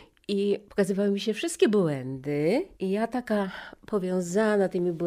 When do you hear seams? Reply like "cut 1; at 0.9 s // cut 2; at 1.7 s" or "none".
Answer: cut 1; at 2.7 s